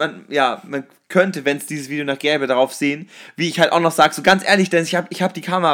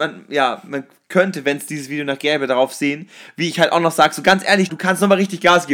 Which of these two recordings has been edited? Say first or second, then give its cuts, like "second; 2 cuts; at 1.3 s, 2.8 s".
second; 1 cut; at 4.7 s